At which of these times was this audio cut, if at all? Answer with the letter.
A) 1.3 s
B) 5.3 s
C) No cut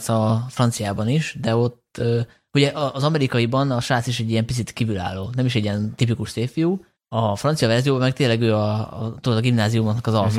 C